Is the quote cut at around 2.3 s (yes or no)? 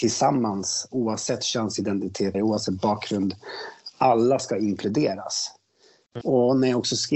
yes